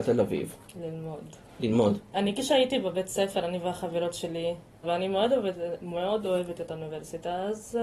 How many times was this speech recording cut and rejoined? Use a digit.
2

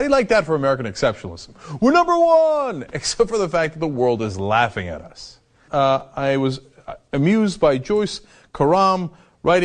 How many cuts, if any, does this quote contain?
1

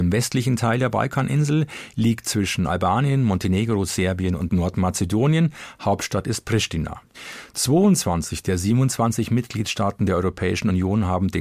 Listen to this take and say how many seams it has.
0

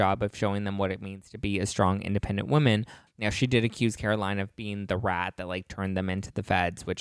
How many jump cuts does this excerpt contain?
1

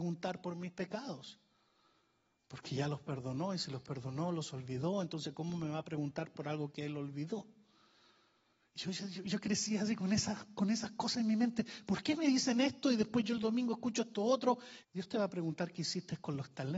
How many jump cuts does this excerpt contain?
1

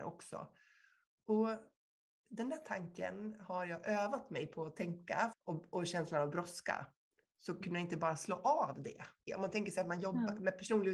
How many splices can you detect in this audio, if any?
2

